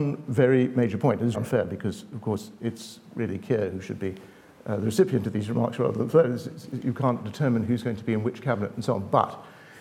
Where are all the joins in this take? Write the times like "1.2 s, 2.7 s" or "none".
1.3 s